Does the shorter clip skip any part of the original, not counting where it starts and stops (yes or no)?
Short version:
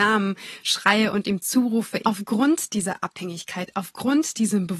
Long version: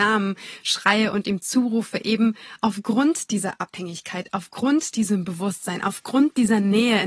yes